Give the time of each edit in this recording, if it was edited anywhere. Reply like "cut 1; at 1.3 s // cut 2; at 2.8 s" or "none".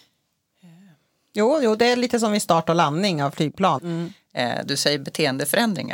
cut 1; at 3.8 s